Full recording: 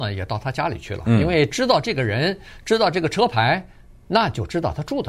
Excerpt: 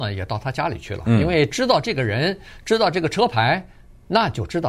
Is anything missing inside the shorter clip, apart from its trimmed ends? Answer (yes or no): no